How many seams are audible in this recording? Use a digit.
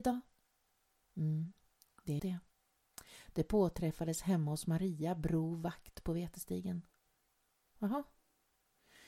1